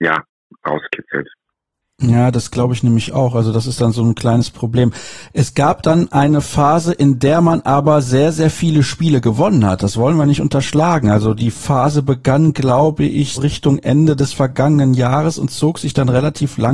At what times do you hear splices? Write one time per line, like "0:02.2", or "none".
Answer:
0:13.4